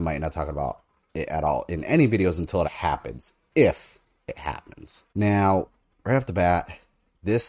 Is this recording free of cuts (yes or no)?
no